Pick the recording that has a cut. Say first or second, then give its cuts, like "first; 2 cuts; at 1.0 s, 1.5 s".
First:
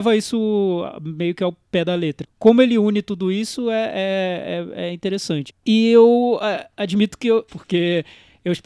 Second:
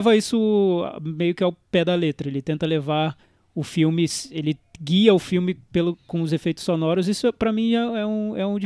first; 3 cuts; at 2.2 s, 5.5 s, 7.5 s